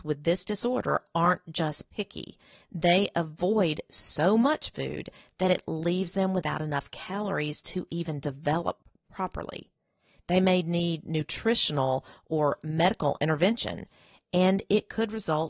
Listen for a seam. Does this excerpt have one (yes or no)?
no